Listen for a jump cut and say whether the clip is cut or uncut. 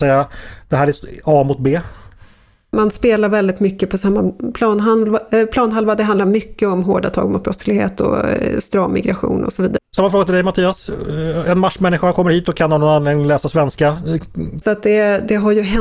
cut